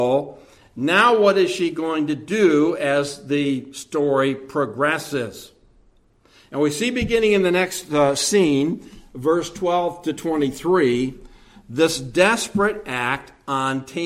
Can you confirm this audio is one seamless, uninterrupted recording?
yes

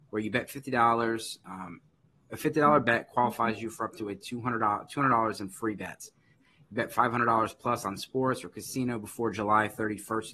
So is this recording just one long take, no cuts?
no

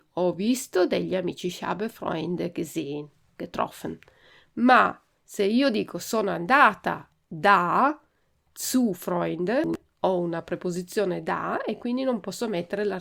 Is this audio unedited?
yes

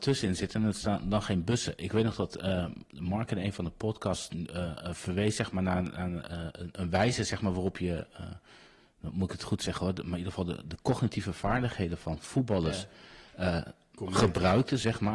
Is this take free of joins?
yes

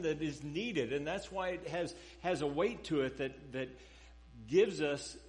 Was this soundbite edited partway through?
no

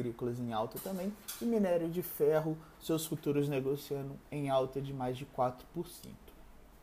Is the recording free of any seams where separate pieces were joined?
yes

